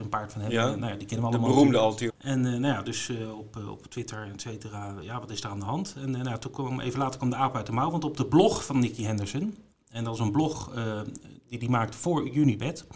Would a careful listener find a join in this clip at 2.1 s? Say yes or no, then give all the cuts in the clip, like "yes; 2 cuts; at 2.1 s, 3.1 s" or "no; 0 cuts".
yes; 1 cut; at 2.1 s